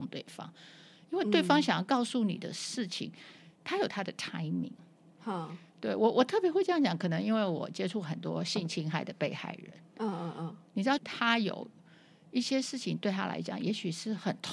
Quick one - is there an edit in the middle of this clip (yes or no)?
yes